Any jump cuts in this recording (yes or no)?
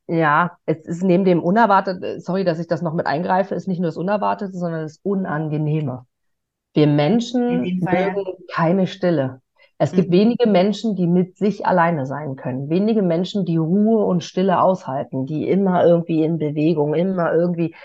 no